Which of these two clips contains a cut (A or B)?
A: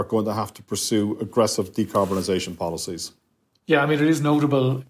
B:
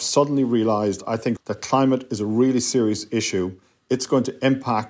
B